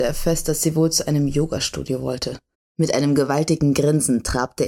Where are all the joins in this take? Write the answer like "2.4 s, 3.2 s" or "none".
2.5 s